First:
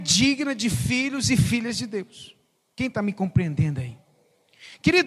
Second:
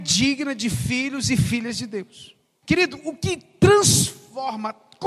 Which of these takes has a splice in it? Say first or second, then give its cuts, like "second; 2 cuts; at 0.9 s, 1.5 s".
second; 1 cut; at 2.6 s